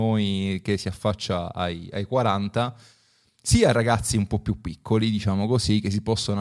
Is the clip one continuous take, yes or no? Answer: yes